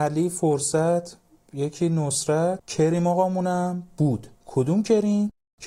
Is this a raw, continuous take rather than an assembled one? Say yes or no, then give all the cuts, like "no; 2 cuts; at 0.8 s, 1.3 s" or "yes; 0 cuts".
no; 1 cut; at 4.4 s